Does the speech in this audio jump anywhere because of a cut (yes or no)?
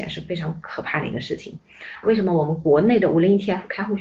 yes